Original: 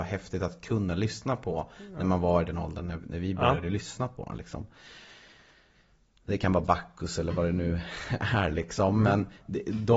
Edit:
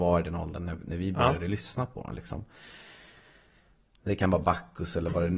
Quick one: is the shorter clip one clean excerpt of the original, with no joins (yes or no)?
yes